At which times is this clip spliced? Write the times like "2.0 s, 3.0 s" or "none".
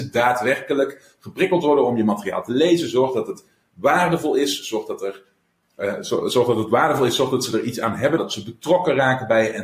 5.6 s, 8.2 s